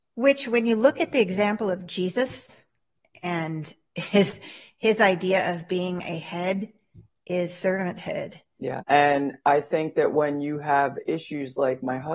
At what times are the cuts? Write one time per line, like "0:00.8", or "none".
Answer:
0:08.8